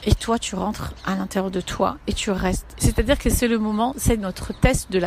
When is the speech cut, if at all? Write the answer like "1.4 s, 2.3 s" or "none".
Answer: 2.8 s